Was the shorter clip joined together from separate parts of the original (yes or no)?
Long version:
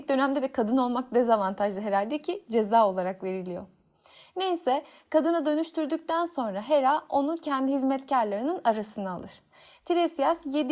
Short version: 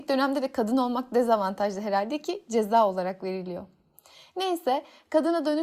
no